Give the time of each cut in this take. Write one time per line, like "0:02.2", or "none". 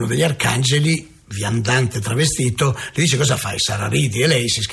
none